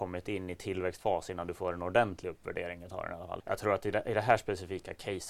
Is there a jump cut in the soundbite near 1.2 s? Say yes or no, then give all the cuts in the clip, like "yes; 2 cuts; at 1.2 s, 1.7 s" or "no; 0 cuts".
no; 1 cut; at 3.4 s